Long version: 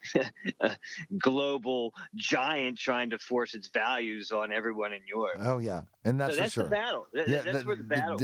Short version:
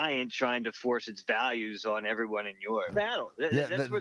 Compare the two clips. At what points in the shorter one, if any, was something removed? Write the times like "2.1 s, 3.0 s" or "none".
2.9 s